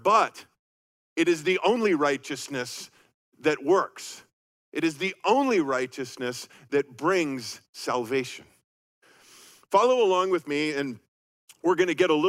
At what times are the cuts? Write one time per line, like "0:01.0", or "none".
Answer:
none